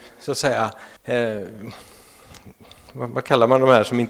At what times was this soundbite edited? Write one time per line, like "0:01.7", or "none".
0:01.0